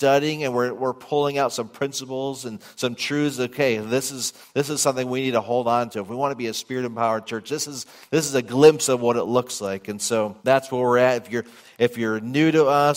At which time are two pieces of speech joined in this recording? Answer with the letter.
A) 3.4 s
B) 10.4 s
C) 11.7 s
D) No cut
B